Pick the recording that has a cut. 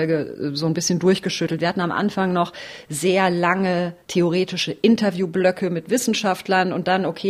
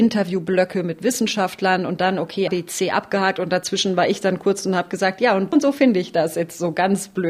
second; 2 cuts; at 2.5 s, 5.5 s

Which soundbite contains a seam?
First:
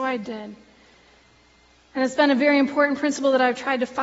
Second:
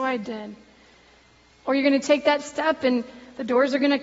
second; 1 cut; at 1.5 s

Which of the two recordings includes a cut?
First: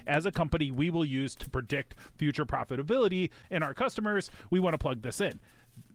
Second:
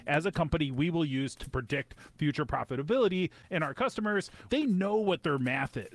second; 1 cut; at 4.5 s

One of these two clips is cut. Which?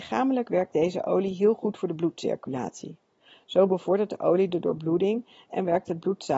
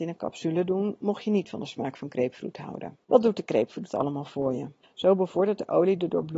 second; 2 cuts; at 3.0 s, 4.8 s

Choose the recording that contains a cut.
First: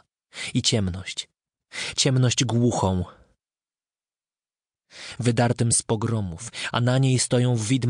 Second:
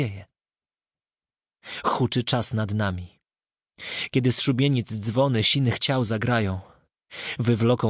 first; 1 cut; at 5.2 s

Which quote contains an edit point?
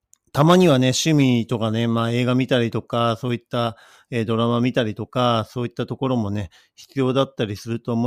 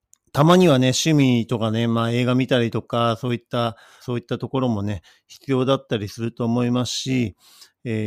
second; 1 cut; at 4.0 s

